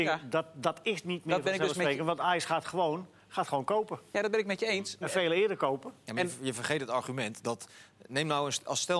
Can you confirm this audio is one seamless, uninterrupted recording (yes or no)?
no